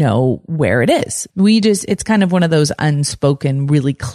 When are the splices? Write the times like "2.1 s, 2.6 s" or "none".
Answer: 1.3 s